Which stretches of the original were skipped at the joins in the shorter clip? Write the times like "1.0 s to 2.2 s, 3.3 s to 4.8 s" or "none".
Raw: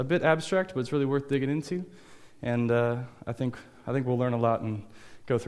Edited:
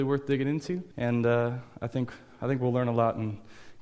1.9 s to 2.4 s